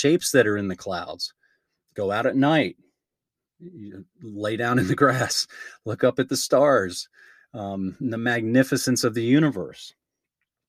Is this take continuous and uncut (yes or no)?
yes